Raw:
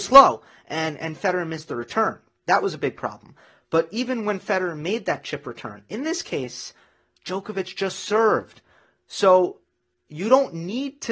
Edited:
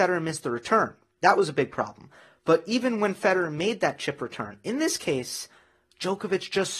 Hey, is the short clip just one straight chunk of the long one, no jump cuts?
yes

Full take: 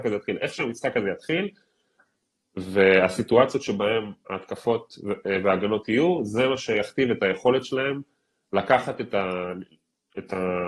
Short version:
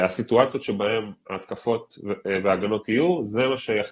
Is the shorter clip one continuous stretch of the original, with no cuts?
yes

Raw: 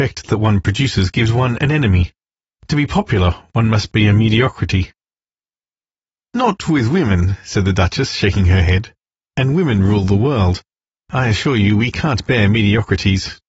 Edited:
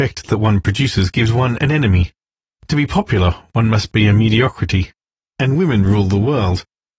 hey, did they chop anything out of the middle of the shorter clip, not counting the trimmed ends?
yes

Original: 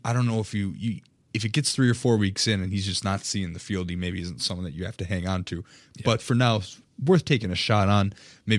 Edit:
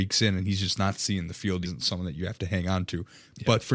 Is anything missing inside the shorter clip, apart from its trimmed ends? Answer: yes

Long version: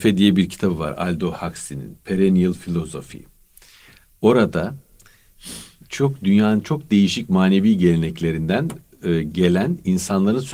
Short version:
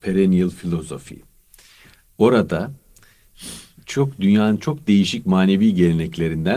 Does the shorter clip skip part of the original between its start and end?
no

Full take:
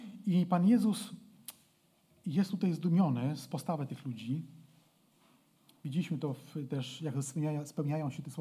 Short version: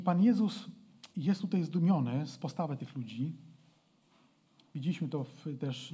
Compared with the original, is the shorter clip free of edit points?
no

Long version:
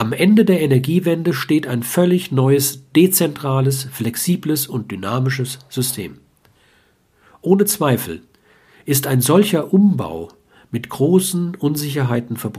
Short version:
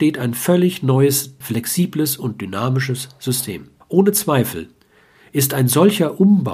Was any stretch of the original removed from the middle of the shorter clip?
yes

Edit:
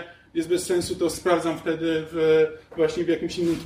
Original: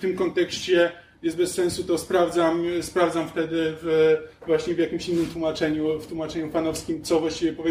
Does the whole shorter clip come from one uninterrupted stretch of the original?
no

